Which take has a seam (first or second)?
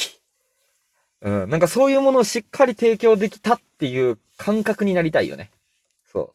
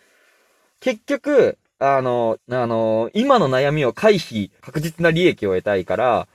second